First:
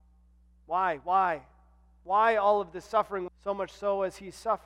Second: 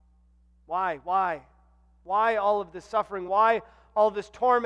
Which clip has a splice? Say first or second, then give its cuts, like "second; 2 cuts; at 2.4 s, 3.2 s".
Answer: first; 1 cut; at 3.3 s